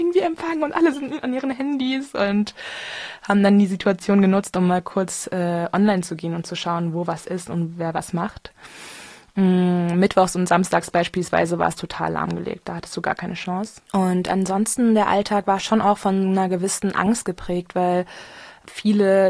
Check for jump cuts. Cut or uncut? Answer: uncut